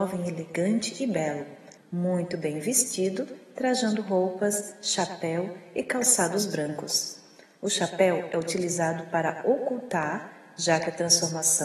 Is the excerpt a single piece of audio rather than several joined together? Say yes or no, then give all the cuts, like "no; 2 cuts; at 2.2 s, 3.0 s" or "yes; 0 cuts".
no; 1 cut; at 1.8 s